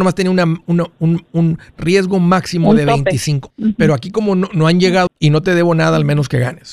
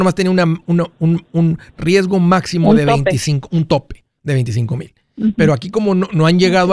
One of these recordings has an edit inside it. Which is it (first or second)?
first